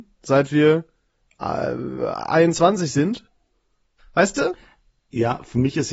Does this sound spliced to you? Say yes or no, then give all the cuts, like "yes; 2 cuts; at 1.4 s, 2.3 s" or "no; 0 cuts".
yes; 1 cut; at 4.0 s